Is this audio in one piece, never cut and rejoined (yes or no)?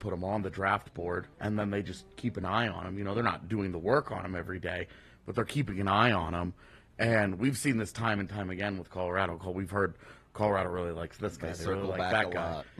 no